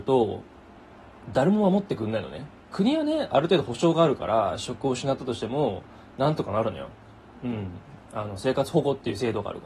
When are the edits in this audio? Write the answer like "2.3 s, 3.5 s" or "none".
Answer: 2.7 s